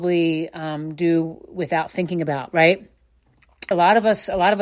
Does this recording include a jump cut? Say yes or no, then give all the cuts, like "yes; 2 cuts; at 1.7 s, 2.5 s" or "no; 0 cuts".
yes; 1 cut; at 3.7 s